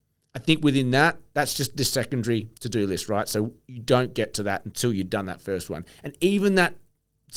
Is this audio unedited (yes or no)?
yes